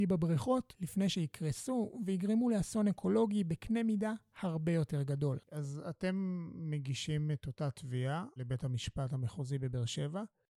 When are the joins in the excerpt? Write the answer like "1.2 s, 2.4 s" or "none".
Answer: 5.4 s